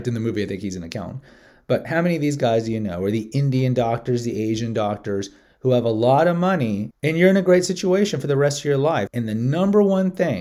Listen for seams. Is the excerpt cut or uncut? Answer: cut